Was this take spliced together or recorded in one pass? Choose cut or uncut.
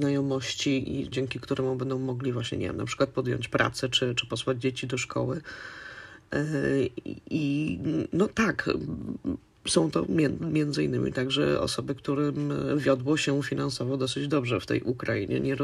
cut